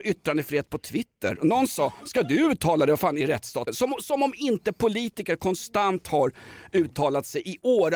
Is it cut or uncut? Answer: uncut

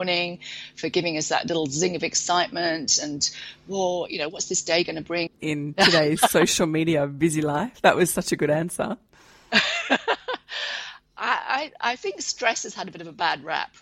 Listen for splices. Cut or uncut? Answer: cut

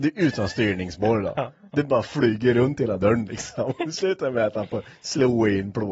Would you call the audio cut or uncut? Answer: uncut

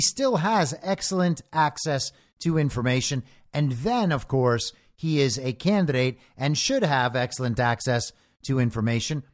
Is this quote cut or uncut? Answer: uncut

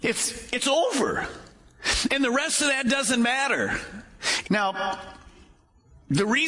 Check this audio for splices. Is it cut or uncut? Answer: cut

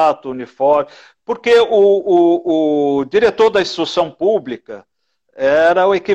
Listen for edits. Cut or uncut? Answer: uncut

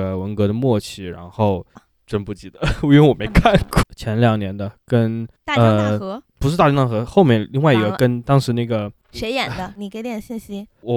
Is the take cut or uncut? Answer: cut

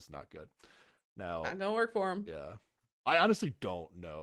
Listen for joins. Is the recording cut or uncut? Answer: uncut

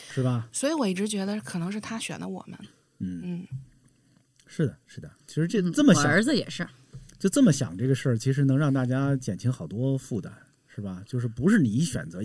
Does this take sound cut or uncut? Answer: uncut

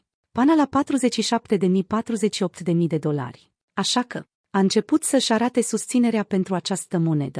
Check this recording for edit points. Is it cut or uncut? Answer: cut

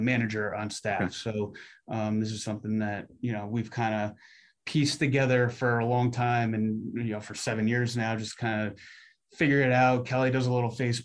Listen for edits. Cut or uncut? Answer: uncut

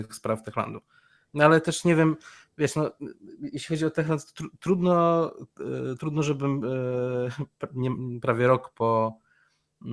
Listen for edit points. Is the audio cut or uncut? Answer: cut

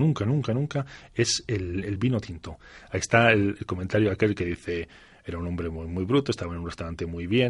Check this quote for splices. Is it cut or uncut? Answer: uncut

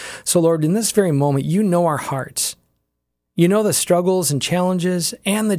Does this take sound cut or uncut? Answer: uncut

